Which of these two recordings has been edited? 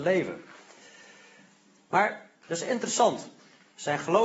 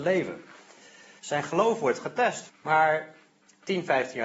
second; 2 cuts; at 1.2 s, 2.5 s

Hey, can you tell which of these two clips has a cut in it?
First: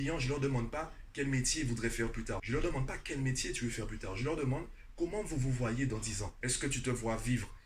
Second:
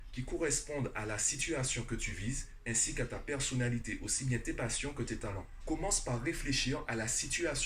first; 2 cuts; at 2.4 s, 6.4 s

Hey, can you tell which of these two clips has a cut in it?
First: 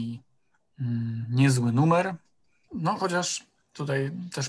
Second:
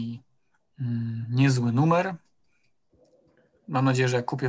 first; 1 cut; at 2.7 s

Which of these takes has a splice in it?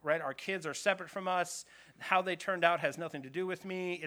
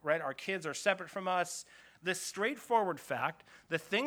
second; 1 cut; at 1.8 s

